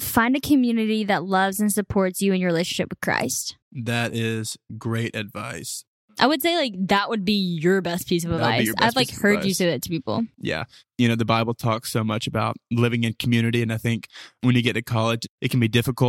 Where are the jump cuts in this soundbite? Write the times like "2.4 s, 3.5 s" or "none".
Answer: 3.6 s